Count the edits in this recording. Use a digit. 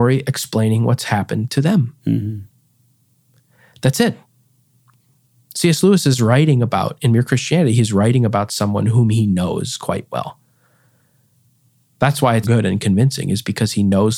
1